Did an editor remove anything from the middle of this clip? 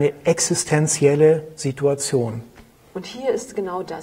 yes; 1 cut; at 2.9 s

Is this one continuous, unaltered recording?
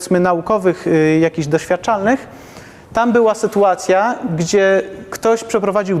yes; 0 cuts

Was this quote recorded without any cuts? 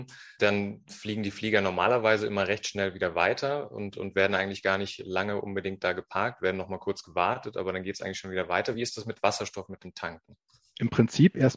yes; 0 cuts

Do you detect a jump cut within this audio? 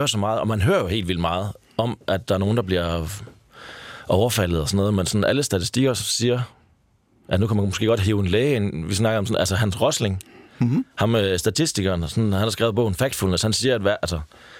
no; 0 cuts

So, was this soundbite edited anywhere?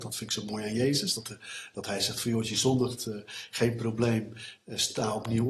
no; 0 cuts

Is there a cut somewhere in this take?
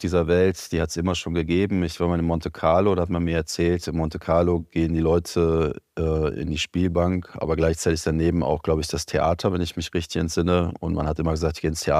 no; 0 cuts

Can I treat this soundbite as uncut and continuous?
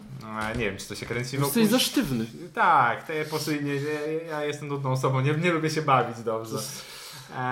yes; 0 cuts

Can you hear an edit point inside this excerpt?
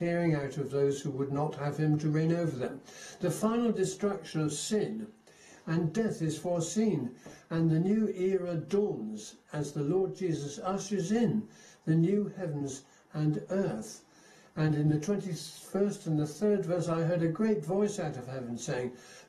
no; 0 cuts

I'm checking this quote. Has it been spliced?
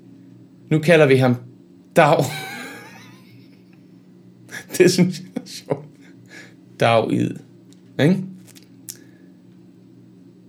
no; 0 cuts

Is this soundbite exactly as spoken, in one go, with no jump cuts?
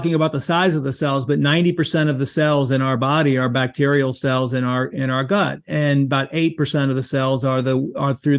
yes; 0 cuts

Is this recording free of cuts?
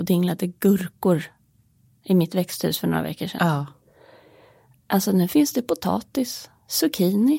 yes; 0 cuts

